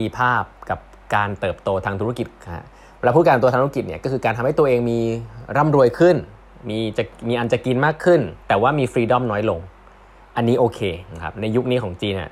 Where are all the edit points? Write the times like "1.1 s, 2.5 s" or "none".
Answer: 8.4 s

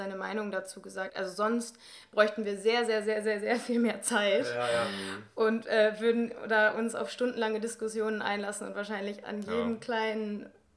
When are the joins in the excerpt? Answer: 1.1 s

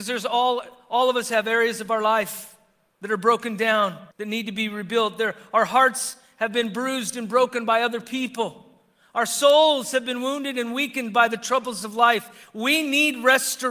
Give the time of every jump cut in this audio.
4.1 s

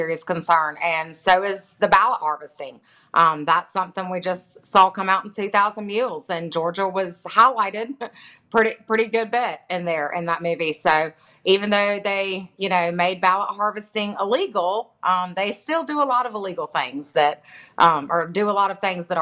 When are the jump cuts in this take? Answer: none

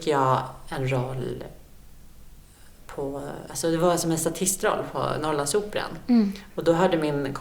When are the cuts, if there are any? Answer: 6.5 s

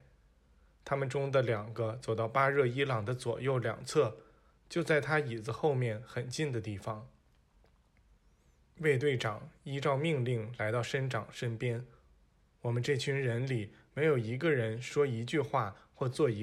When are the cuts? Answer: none

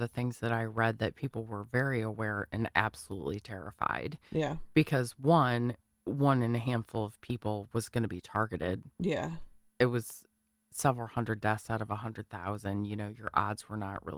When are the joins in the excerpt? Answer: 6.0 s

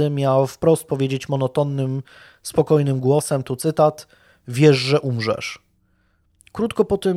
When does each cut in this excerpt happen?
none

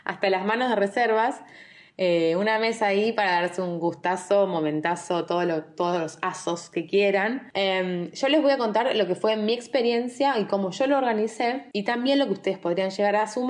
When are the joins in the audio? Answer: 7.5 s

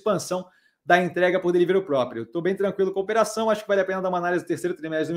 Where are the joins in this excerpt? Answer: none

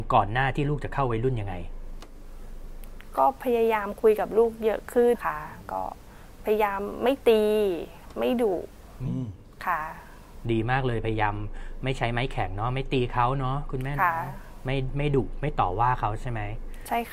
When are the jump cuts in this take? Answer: 5.1 s

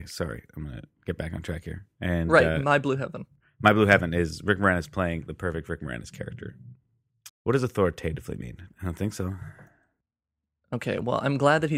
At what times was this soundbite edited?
7.3 s, 8.7 s

